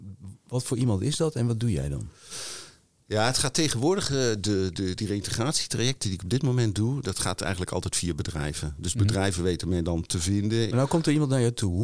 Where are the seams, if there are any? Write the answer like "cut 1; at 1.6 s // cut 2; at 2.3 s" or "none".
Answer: cut 1; at 10.7 s